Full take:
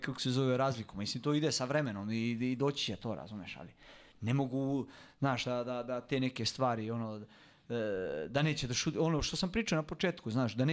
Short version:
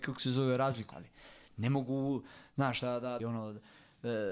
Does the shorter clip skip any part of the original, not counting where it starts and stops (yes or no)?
yes